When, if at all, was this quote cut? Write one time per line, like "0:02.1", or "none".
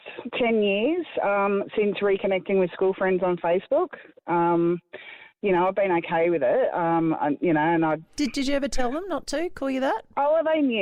none